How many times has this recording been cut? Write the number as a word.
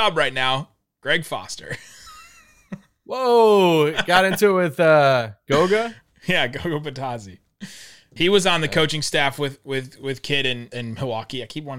two